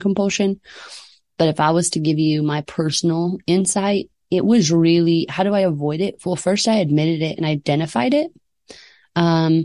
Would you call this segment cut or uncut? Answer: uncut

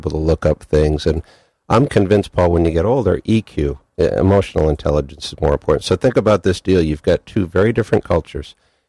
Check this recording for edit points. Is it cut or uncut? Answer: uncut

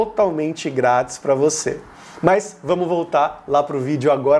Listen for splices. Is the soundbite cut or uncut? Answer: uncut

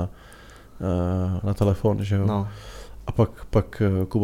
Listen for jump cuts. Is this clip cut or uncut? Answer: uncut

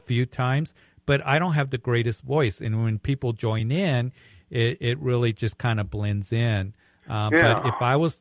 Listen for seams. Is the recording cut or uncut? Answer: uncut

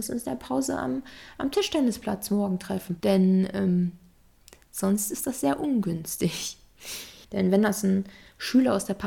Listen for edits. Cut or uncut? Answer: cut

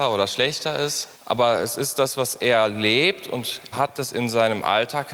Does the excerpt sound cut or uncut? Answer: cut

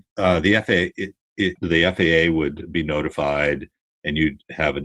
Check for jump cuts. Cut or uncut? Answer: cut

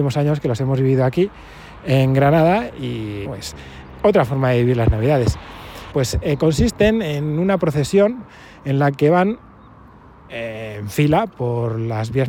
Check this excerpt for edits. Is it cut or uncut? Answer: cut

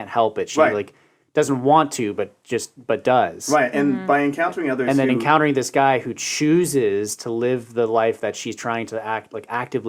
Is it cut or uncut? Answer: uncut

